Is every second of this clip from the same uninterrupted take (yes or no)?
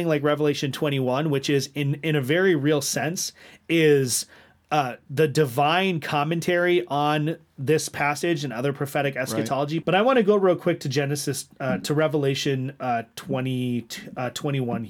no